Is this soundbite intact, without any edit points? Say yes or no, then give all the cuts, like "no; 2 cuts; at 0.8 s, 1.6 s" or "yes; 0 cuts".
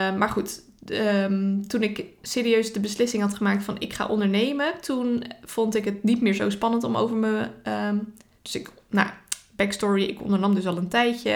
yes; 0 cuts